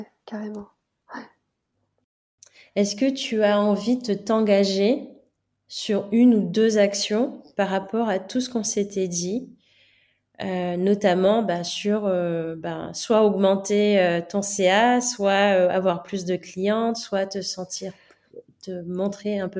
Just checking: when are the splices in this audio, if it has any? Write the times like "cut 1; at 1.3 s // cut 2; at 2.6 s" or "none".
none